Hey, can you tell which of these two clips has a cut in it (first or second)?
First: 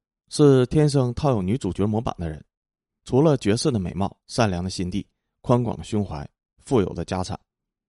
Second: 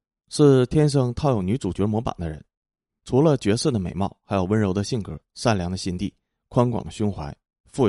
first